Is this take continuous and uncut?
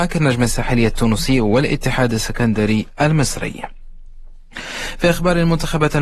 no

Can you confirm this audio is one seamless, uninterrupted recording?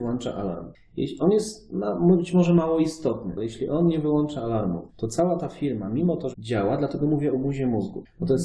no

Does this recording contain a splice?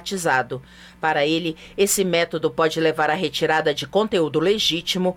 no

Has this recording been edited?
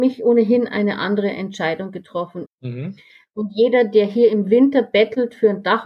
yes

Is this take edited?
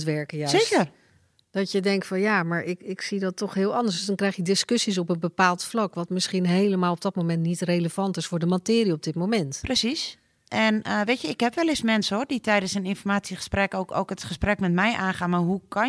no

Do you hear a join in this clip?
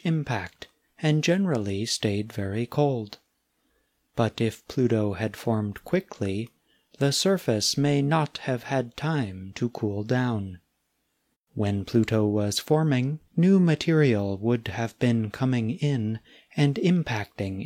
yes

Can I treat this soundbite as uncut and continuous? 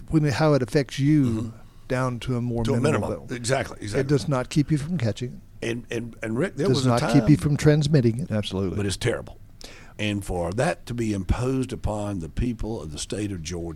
no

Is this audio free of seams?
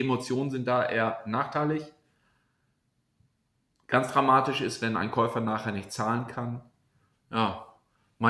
no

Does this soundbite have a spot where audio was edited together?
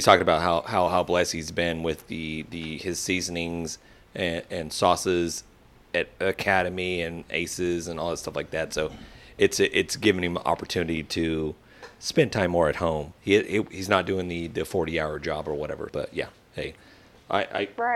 yes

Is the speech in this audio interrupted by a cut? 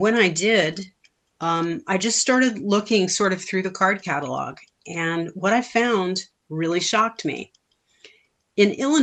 no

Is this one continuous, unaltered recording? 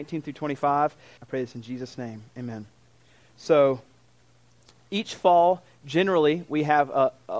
no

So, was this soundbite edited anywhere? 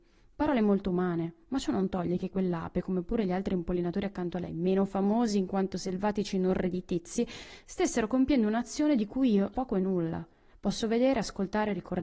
yes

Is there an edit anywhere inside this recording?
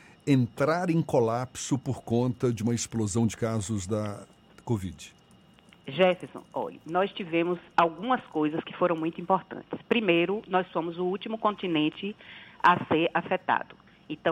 no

